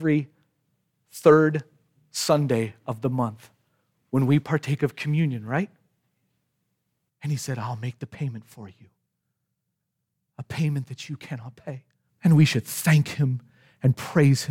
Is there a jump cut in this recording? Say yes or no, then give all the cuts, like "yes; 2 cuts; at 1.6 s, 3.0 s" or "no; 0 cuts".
yes; 2 cuts; at 7.1 s, 12.1 s